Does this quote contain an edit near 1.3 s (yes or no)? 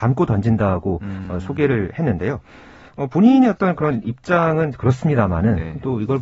no